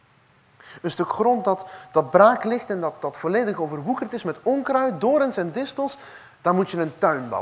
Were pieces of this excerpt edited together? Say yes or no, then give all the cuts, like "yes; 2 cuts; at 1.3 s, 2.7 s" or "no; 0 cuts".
no; 0 cuts